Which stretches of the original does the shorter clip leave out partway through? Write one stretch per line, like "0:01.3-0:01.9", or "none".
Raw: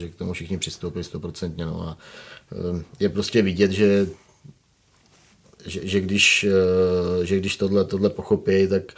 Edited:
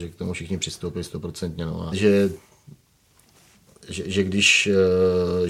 0:01.9-0:03.7